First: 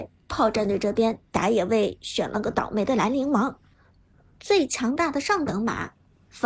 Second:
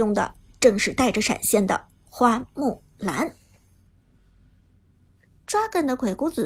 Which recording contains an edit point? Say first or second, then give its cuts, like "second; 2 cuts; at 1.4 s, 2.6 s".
second; 1 cut; at 5.4 s